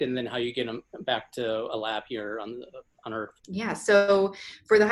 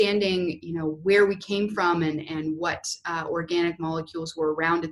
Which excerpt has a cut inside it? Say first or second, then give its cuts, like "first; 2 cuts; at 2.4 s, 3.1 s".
first; 1 cut; at 3.4 s